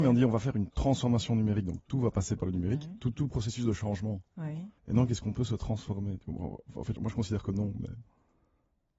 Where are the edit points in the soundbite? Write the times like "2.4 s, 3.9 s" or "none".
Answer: 4.8 s, 7.0 s